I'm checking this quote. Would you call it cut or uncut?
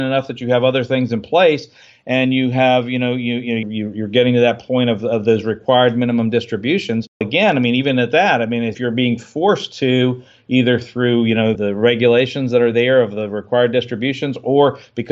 cut